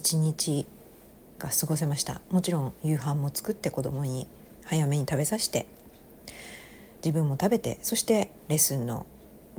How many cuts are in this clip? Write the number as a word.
one